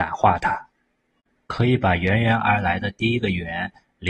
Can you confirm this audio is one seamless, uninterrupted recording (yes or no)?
yes